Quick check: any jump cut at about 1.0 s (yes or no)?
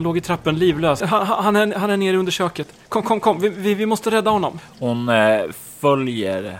yes